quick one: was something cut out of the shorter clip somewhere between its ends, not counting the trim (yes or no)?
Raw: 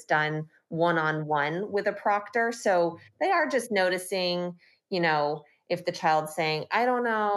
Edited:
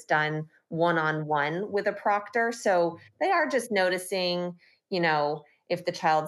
no